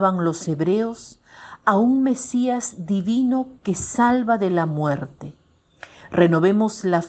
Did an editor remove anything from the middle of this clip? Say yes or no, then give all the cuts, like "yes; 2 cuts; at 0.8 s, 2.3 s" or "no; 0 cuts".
no; 0 cuts